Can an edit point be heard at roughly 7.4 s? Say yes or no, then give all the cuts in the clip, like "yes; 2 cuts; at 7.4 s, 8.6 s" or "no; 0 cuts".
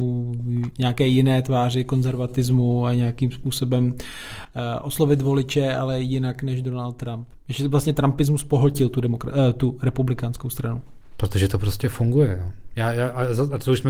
yes; 1 cut; at 7.4 s